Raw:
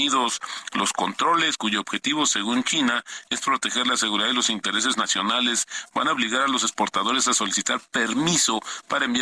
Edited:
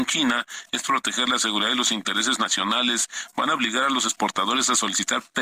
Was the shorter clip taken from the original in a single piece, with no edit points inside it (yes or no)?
yes